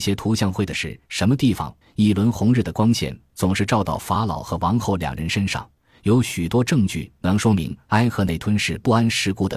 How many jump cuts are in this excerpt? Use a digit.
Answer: 1